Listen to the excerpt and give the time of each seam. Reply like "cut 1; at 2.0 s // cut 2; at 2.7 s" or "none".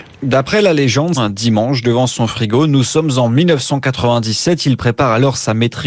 cut 1; at 1.2 s

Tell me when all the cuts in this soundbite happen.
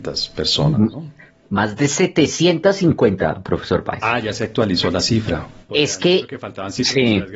none

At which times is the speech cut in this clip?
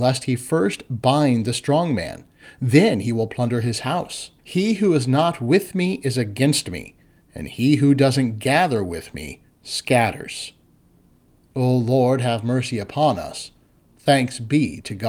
cut 1; at 4.4 s

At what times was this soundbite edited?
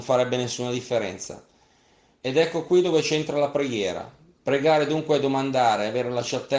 cut 1; at 4.4 s

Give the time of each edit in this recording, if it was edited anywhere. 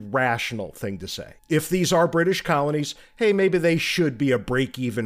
cut 1; at 1.4 s

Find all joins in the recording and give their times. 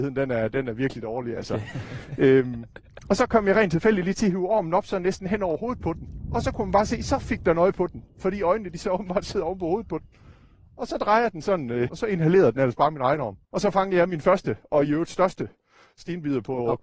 cut 1; at 11.9 s // cut 2; at 13.4 s

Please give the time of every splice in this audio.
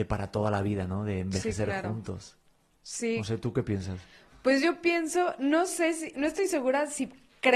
none

